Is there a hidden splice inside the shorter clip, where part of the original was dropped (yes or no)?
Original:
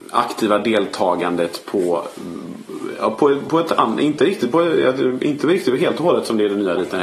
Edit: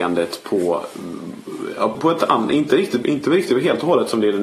yes